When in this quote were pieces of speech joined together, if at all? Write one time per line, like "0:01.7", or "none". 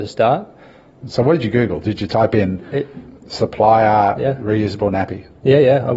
0:01.0